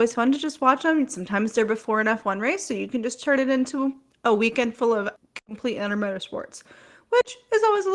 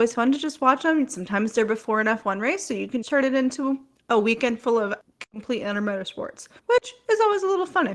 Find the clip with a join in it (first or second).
second